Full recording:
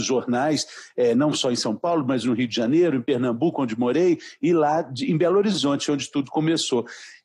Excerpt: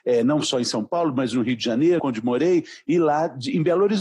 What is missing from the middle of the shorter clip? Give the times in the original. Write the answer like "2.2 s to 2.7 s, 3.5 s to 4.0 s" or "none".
2.9 s to 3.5 s